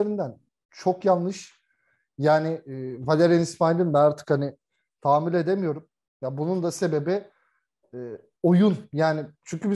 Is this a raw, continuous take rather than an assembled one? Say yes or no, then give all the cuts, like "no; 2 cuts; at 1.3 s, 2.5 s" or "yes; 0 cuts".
yes; 0 cuts